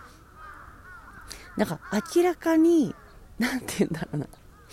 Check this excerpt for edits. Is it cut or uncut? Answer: uncut